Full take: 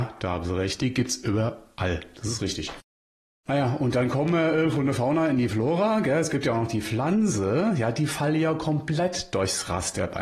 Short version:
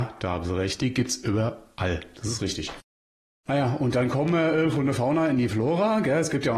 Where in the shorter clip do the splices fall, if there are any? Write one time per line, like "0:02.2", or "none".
none